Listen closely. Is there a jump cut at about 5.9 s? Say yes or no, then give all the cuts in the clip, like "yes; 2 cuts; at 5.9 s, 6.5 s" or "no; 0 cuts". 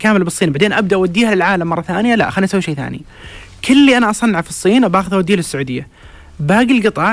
no; 0 cuts